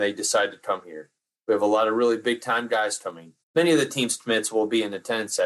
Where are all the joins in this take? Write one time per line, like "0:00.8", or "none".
0:03.4